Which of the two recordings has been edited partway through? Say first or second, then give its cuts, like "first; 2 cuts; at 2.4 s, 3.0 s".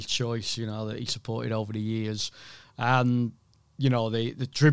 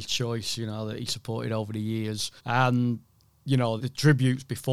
second; 2 cuts; at 2.4 s, 3.8 s